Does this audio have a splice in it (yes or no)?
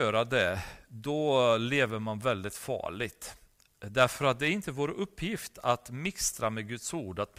no